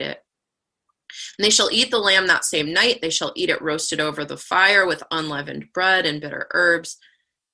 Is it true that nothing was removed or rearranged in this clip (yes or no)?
yes